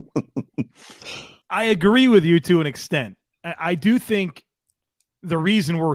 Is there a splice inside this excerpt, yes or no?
yes